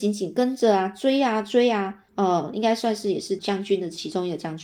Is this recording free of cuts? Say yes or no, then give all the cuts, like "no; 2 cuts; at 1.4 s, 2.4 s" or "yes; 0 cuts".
no; 2 cuts; at 2.1 s, 3.4 s